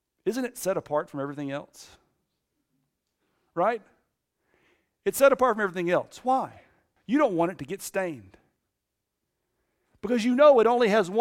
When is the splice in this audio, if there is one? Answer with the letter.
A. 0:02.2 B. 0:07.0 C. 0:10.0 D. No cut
B